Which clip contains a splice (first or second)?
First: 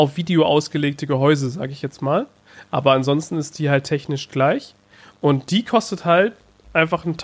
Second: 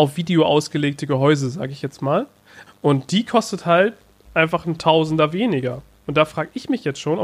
second